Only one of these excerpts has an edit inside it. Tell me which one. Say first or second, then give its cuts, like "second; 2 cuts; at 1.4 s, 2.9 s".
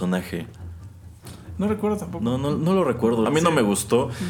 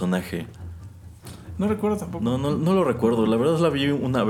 first; 1 cut; at 3.3 s